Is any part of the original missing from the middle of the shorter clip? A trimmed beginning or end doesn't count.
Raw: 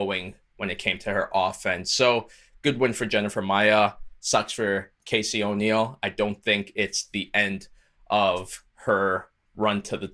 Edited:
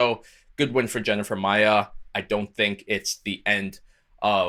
yes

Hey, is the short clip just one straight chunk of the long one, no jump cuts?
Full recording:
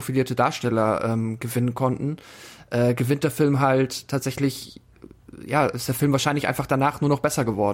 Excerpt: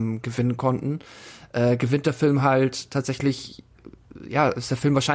yes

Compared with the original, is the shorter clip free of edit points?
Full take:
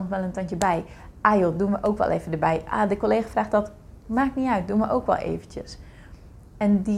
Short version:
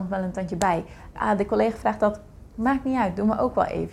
no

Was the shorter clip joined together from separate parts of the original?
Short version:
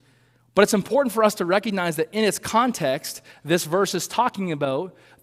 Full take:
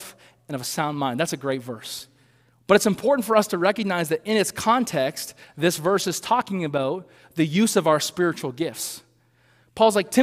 no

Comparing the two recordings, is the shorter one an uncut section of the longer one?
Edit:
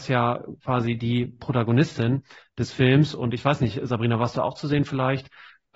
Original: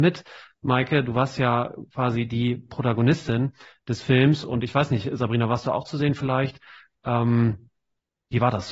yes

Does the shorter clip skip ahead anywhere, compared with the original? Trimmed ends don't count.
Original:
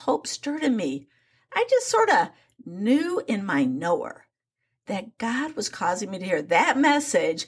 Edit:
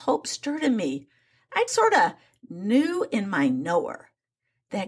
yes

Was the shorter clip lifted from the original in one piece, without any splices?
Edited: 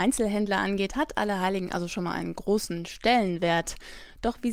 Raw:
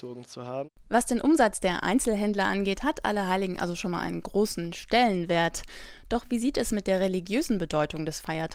yes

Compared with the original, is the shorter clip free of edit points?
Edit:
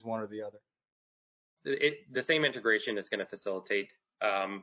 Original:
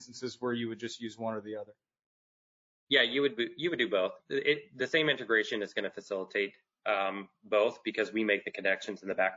no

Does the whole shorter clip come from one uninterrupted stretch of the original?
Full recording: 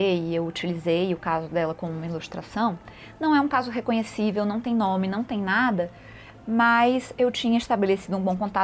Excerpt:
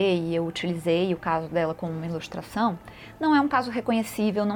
yes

